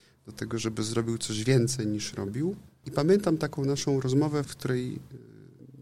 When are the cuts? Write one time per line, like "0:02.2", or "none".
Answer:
0:02.8
0:04.4